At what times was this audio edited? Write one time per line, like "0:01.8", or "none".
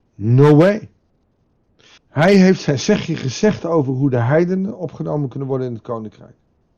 0:02.0